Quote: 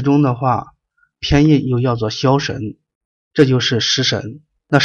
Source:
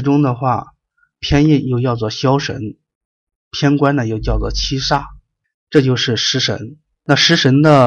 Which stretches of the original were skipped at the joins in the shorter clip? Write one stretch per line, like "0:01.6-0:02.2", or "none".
0:03.2-0:05.6